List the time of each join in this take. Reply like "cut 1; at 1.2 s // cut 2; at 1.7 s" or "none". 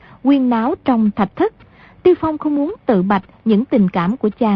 none